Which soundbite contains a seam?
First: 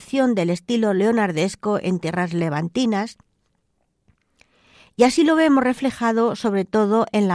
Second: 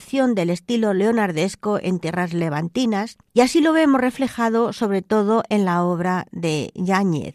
second; 1 cut; at 3.3 s

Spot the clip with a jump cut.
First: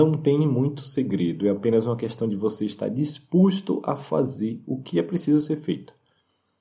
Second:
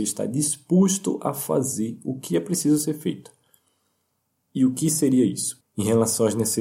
second; 1 cut; at 5.6 s

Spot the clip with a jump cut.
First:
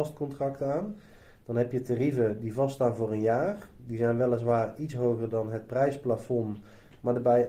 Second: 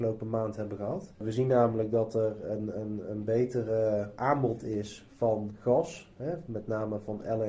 second; 1 cut; at 1.1 s

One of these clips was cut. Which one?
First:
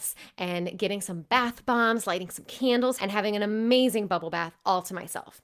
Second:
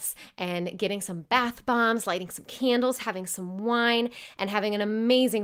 first; 1 cut; at 3.0 s

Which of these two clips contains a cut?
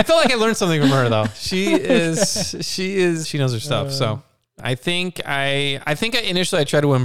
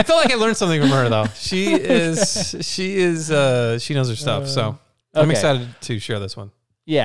first; 2 cuts; at 3.2 s, 4.6 s

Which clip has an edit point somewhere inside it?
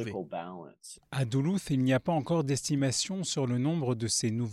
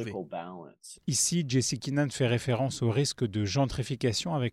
first; 1 cut; at 1.0 s

